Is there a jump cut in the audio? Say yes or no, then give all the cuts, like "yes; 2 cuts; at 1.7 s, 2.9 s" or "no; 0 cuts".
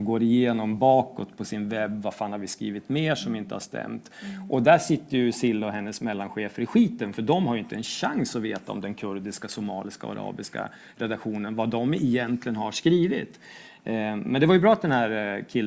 no; 0 cuts